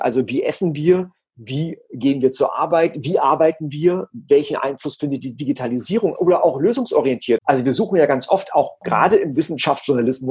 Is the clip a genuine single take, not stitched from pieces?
no; 1 cut; at 7.4 s

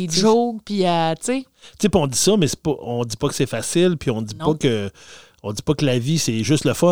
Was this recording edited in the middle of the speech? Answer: no; 0 cuts

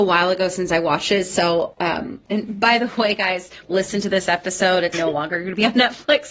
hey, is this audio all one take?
no; 2 cuts; at 3.6 s, 4.9 s

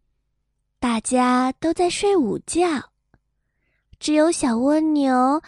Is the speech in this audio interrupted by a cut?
no; 0 cuts

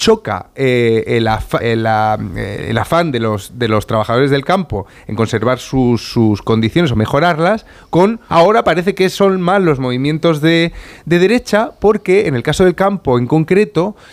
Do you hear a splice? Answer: yes; 2 cuts; at 1.6 s, 8.3 s

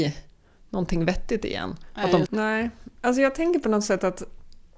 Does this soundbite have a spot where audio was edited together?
yes; 1 cut; at 2.3 s

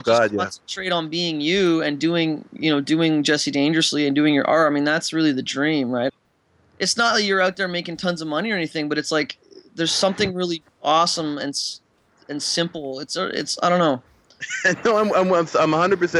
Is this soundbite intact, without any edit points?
no; 1 cut; at 6.1 s

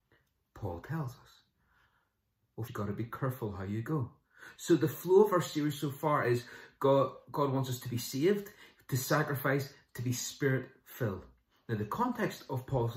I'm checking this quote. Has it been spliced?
yes; 2 cuts; at 2.7 s, 4.6 s

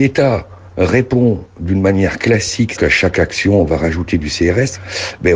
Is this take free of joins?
no; 1 cut; at 2.8 s

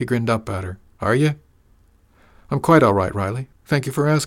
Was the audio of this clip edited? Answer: no; 0 cuts

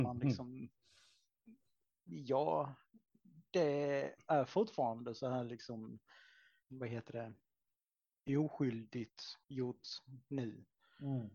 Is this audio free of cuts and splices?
no; 2 cuts; at 6.6 s, 9.4 s

